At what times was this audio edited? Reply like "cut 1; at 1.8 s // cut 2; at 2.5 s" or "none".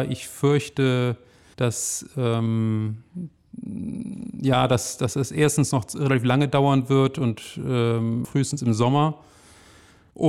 cut 1; at 8.2 s